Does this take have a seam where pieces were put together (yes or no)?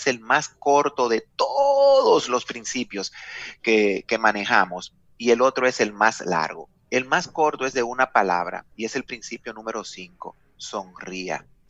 yes